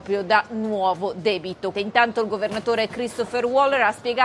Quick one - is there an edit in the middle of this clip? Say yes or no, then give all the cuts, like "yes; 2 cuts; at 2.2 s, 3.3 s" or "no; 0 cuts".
yes; 1 cut; at 1.7 s